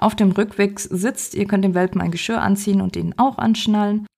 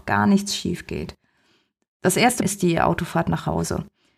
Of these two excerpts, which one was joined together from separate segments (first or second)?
second